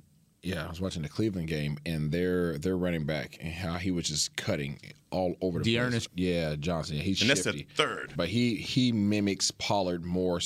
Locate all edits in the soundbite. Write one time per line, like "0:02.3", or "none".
0:06.1
0:08.2